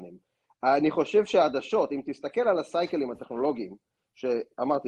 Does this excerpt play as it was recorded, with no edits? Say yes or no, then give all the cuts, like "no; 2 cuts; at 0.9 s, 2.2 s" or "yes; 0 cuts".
yes; 0 cuts